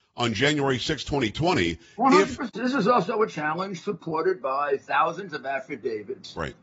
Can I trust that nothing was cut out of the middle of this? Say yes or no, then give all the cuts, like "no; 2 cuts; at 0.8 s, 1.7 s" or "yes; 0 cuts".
no; 1 cut; at 2.5 s